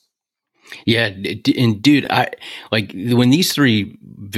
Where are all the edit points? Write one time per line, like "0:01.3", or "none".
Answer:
none